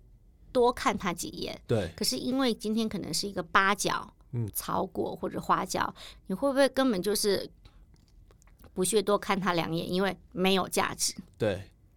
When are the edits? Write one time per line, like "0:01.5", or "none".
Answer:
0:04.5
0:06.1